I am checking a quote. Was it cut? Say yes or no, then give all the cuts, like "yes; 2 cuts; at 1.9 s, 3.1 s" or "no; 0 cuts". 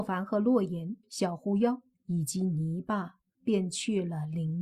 yes; 1 cut; at 1.0 s